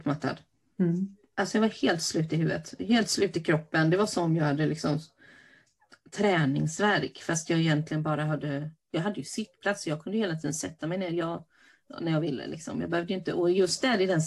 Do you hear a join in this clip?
no; 0 cuts

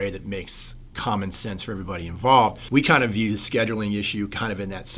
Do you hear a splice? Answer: no; 0 cuts

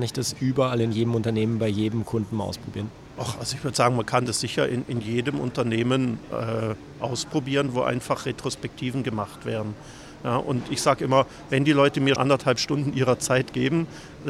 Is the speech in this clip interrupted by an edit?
yes; 1 cut; at 12.2 s

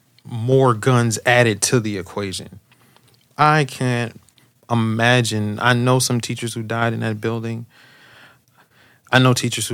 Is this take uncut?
yes; 0 cuts

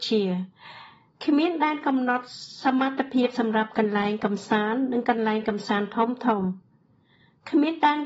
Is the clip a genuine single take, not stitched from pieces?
yes; 0 cuts

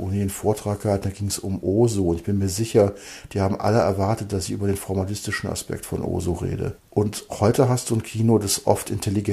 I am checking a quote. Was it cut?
yes; 1 cut; at 6.8 s

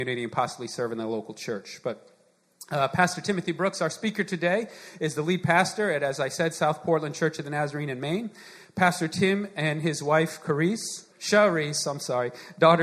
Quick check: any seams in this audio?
yes; 1 cut; at 11.1 s

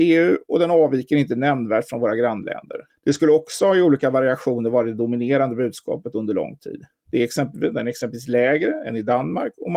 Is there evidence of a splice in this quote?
yes; 2 cuts; at 2.9 s, 7.0 s

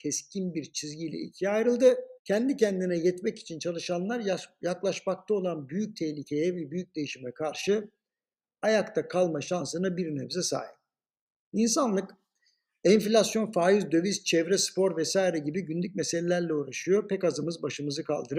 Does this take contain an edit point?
yes; 1 cut; at 2.2 s

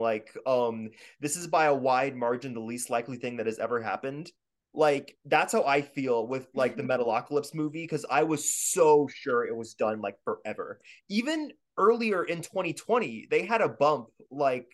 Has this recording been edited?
no; 0 cuts

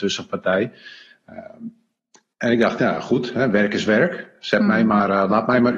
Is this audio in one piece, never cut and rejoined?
yes; 0 cuts

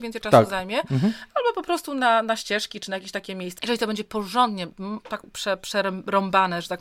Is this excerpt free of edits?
no; 2 cuts; at 3.6 s, 5.2 s

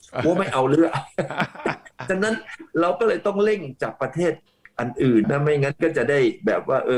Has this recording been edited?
yes; 1 cut; at 5.2 s

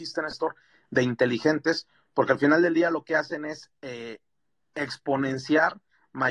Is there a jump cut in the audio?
no; 0 cuts

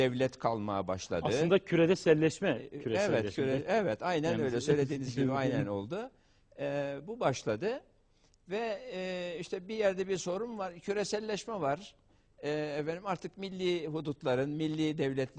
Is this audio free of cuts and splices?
yes; 0 cuts

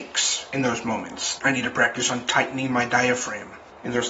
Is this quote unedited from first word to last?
no; 1 cut; at 1.4 s

